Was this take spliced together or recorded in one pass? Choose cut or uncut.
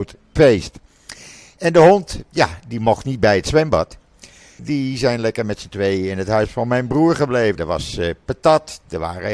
cut